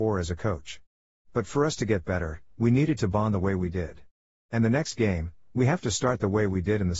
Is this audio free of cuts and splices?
no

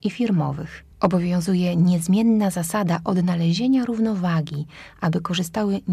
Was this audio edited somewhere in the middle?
yes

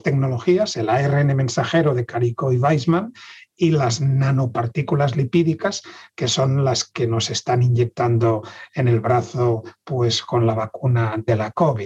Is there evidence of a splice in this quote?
no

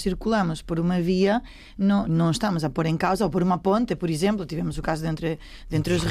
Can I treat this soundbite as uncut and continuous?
no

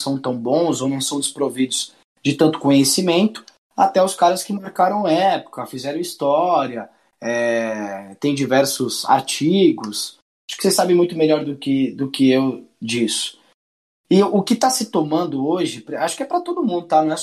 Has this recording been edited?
no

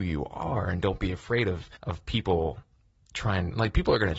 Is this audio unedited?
no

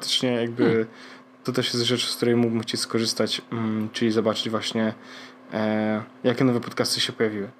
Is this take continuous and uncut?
yes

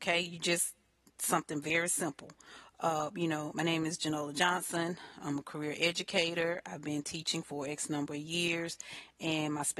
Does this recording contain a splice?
no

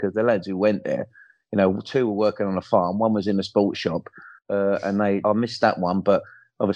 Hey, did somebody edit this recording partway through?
yes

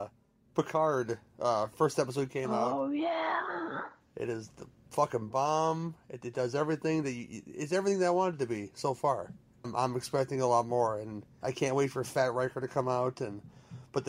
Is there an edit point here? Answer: yes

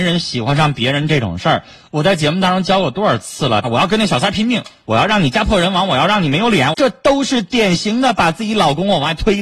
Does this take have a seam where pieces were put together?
yes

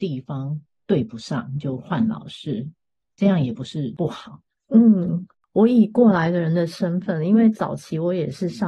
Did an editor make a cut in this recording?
yes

